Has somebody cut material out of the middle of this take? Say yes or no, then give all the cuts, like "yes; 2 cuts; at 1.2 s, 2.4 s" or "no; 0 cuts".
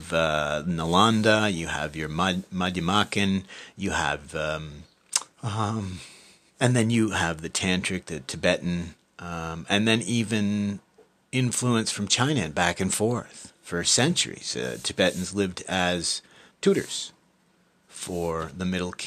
yes; 2 cuts; at 5.3 s, 16.5 s